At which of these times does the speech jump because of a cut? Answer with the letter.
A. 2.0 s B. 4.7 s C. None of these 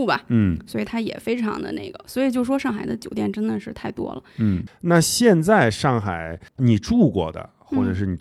B